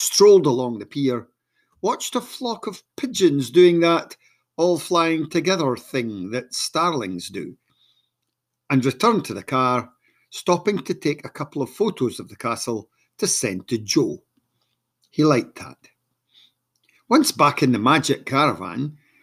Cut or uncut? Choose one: uncut